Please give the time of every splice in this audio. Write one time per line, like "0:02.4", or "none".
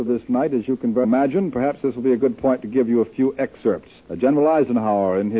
0:01.0
0:04.0